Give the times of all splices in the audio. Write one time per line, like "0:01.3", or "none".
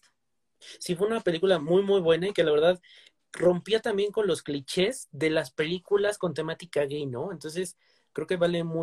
none